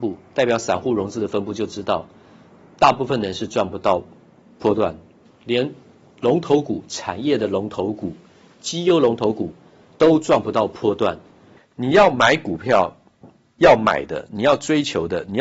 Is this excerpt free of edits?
no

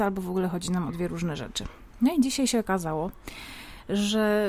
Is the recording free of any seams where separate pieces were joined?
yes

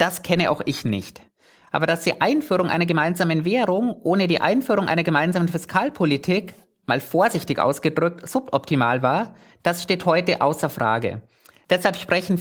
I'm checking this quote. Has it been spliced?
no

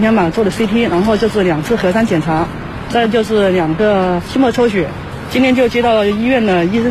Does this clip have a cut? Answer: no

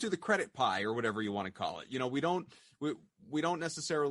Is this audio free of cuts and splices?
yes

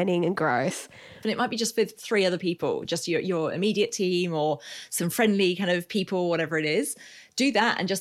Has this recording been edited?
yes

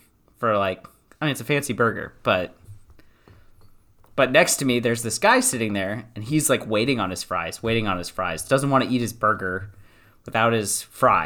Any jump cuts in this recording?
no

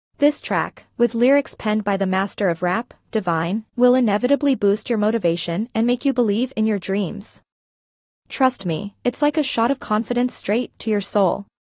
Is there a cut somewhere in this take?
yes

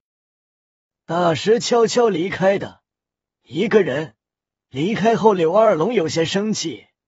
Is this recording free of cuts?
yes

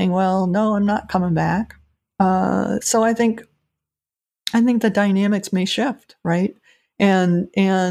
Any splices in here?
no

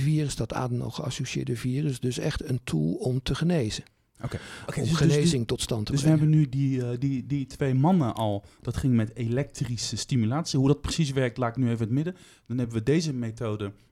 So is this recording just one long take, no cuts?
yes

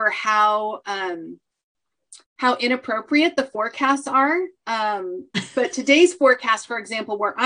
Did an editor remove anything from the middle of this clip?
yes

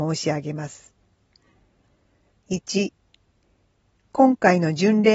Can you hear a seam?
yes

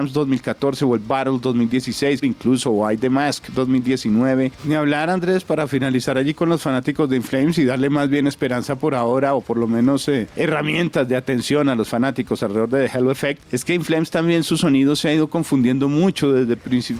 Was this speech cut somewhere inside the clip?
yes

